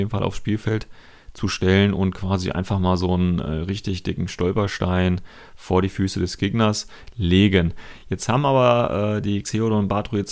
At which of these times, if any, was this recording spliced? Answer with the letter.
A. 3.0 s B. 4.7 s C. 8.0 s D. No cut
D